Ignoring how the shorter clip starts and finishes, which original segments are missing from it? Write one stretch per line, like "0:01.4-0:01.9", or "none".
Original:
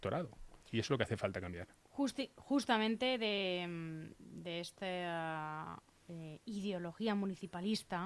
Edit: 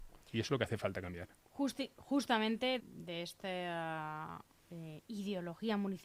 0:03.2-0:04.2